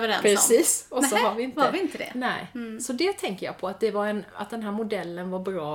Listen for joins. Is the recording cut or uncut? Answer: uncut